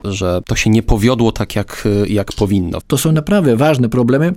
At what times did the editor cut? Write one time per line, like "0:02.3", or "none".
0:02.8